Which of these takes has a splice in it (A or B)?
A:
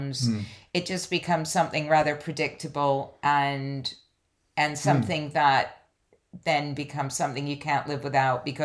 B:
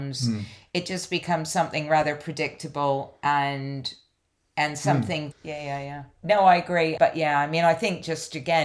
B